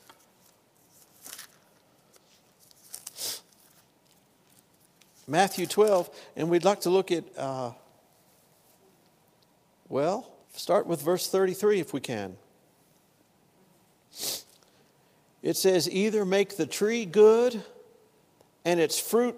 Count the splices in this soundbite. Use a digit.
1